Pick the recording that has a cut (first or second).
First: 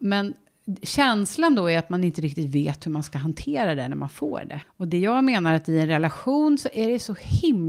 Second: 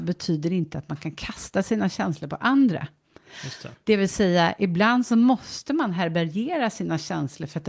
first